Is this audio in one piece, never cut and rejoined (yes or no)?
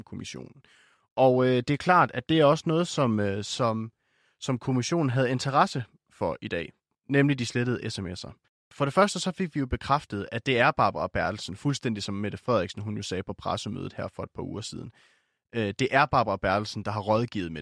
yes